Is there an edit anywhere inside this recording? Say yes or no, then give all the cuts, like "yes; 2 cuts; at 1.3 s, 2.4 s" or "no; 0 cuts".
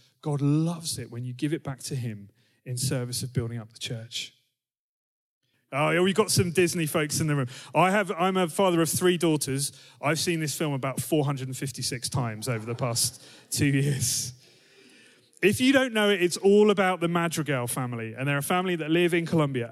yes; 1 cut; at 5.5 s